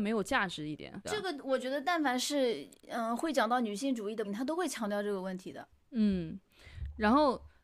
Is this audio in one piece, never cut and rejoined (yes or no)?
no